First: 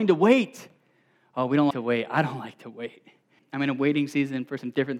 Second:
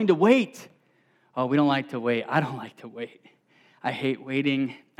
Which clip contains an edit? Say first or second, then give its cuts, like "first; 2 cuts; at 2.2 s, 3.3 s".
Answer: first; 2 cuts; at 1.7 s, 3.4 s